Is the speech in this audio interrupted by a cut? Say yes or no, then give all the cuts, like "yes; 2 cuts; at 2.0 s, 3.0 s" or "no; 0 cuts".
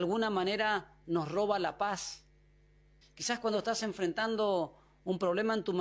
yes; 1 cut; at 3.0 s